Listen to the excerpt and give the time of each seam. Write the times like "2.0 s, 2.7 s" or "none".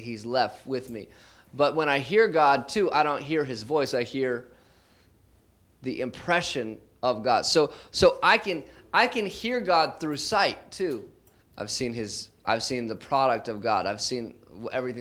11.4 s